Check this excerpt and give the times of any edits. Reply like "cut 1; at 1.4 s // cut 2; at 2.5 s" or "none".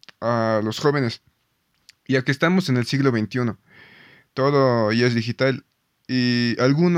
none